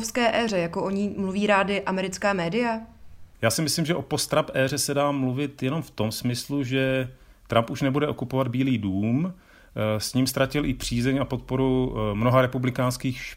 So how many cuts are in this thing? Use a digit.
1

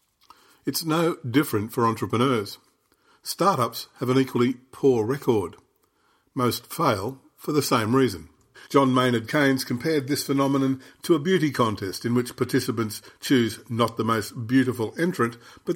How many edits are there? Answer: 1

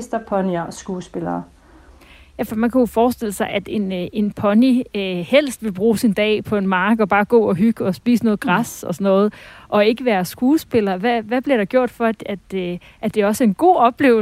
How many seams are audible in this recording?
0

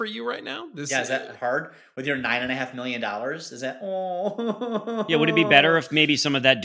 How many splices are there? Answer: 0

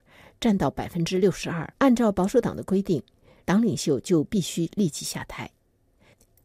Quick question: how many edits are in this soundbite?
2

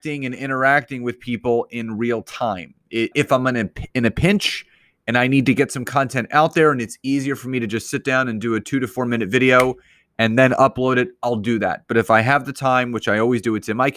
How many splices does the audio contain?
1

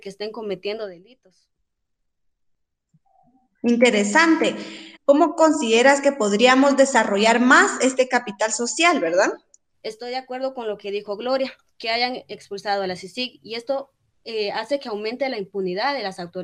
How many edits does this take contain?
2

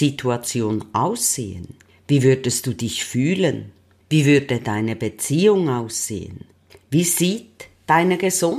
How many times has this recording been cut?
1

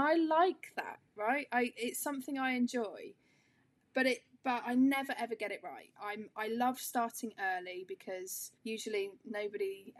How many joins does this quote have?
2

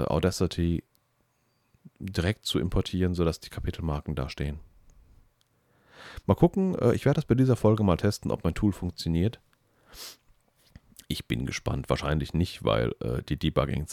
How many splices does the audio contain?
0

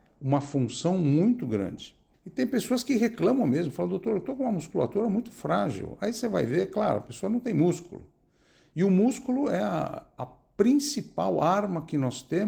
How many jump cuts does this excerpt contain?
1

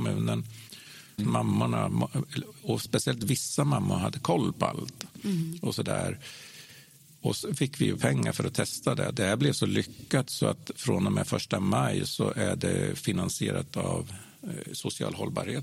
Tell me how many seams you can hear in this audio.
2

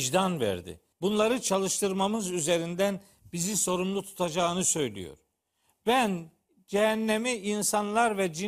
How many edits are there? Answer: 1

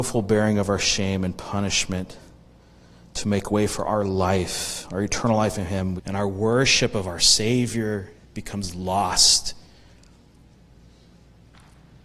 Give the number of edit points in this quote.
2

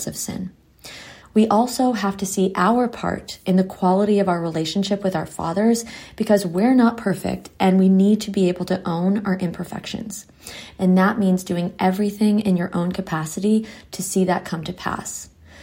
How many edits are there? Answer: 2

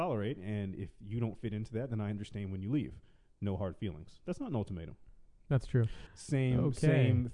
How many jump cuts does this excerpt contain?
1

